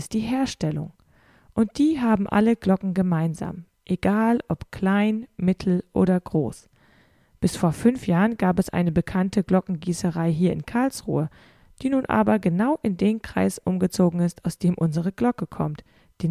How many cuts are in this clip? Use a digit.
0